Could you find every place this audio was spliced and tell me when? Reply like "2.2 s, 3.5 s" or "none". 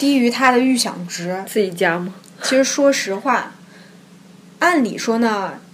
none